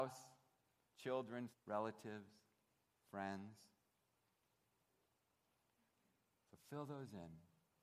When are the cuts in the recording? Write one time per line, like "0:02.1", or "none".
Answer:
0:01.5